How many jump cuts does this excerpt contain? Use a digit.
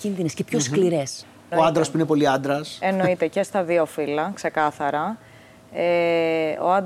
1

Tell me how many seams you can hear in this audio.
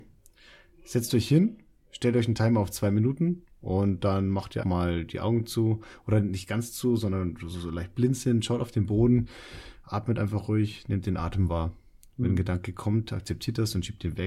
1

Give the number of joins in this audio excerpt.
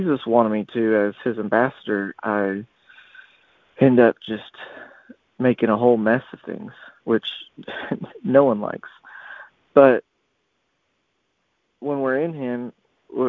1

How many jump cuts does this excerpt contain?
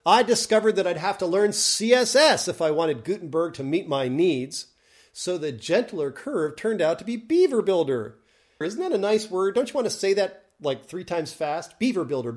1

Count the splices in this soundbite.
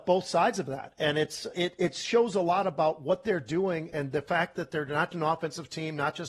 3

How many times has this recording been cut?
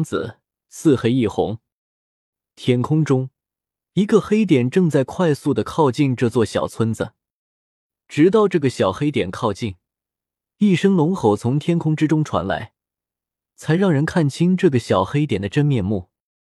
1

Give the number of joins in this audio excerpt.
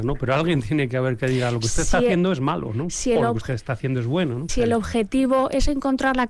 1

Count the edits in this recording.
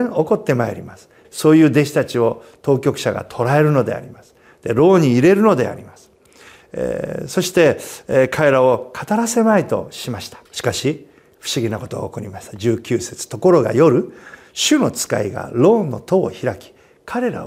2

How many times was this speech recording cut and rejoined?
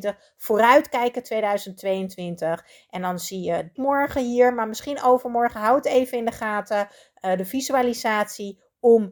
1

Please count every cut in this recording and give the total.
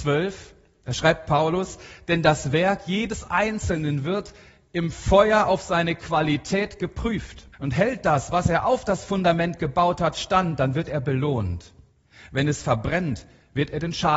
1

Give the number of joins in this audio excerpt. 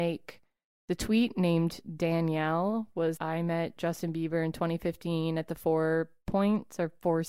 1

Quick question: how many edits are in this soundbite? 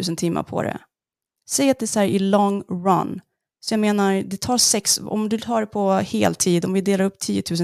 0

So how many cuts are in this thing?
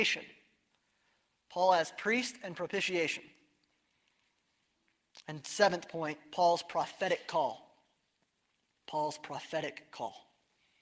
0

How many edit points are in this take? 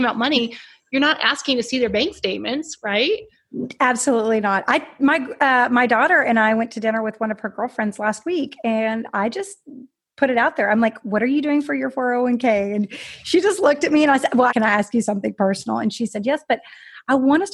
1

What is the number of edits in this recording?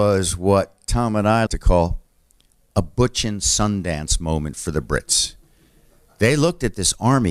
1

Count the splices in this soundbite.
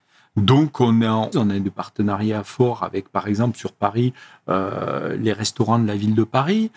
1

